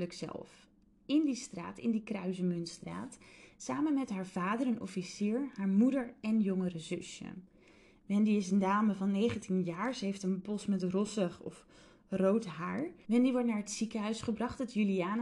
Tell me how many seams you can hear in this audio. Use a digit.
1